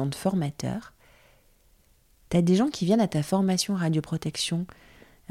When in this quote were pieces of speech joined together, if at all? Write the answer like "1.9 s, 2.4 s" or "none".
none

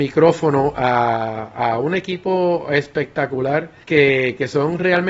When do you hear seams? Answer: 3.8 s

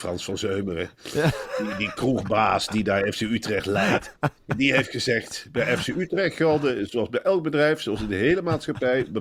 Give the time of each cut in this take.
none

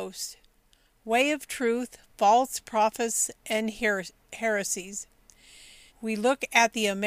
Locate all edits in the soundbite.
5.9 s

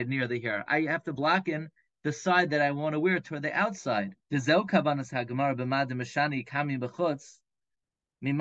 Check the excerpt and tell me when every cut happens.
4.2 s

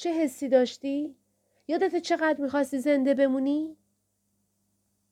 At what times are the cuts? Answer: none

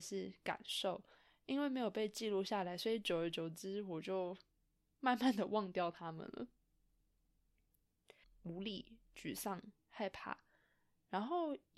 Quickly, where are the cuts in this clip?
8.2 s, 9.8 s

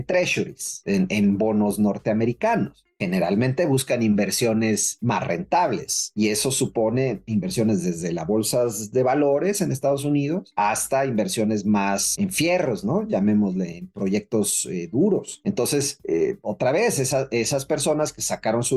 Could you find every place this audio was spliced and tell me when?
none

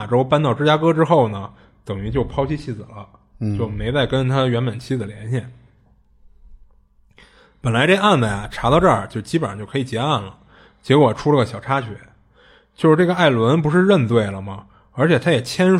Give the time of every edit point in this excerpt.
none

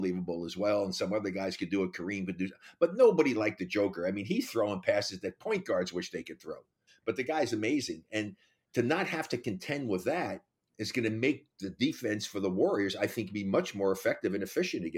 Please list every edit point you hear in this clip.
6.9 s

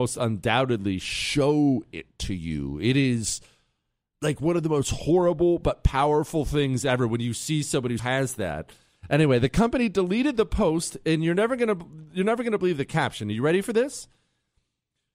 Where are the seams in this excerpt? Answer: 8.0 s

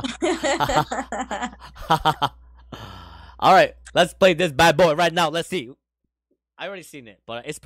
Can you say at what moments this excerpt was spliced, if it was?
none

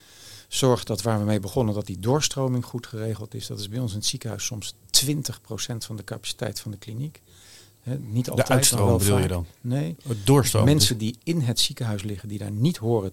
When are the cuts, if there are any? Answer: none

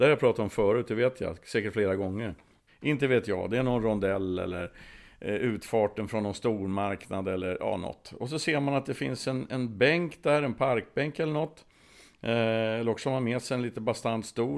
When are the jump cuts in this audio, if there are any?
2.7 s

